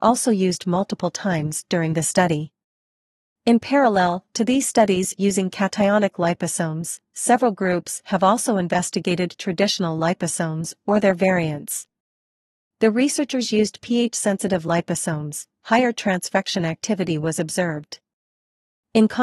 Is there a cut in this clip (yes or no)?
yes